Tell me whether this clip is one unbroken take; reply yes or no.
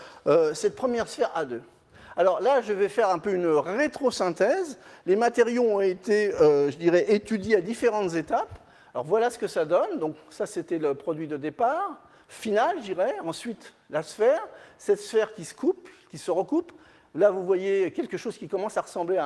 yes